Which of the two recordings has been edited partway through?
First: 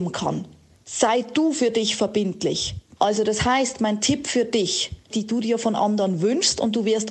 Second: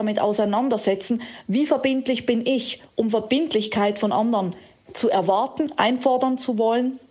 first; 2 cuts; at 3.0 s, 5.1 s

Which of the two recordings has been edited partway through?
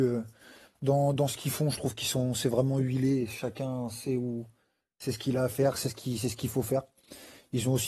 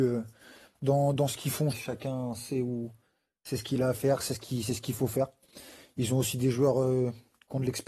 second; 1 cut; at 1.7 s

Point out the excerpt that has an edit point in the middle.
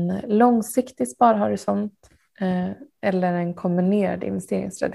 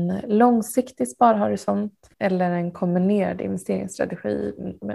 second; 1 cut; at 2.1 s

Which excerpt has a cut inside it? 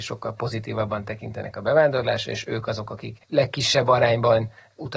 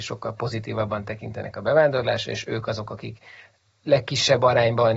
first; 1 cut; at 3.2 s

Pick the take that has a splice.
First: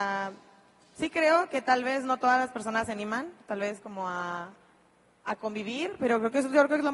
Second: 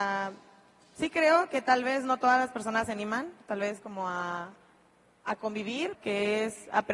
second; 1 cut; at 5.9 s

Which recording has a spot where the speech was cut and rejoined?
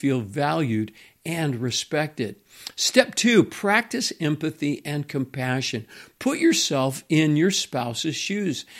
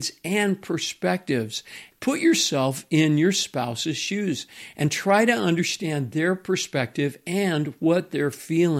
second; 1 cut; at 1.9 s

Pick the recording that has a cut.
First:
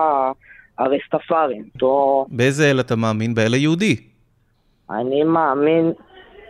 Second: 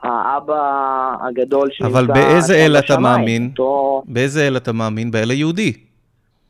first; 1 cut; at 1.8 s

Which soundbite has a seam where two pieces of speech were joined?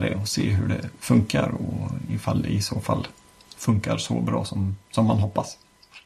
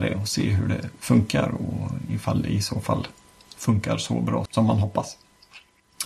second; 1 cut; at 4.5 s

